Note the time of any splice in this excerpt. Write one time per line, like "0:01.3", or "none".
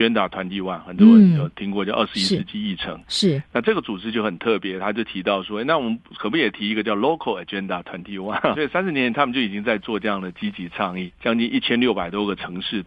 0:08.5
0:11.1

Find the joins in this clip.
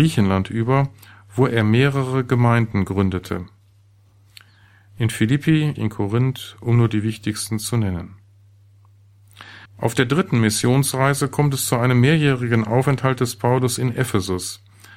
0:05.8
0:09.7

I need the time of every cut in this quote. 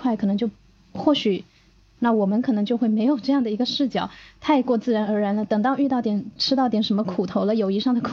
0:02.0

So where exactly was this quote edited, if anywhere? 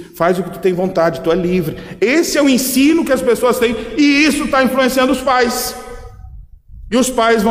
none

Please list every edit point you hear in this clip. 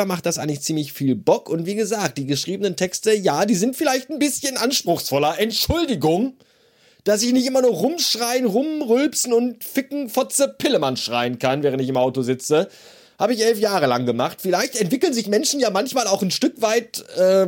none

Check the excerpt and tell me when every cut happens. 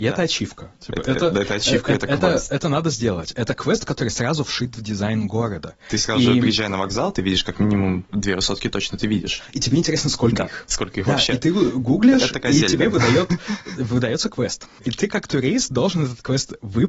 none

